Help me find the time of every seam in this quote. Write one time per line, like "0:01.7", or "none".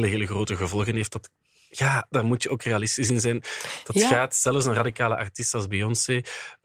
none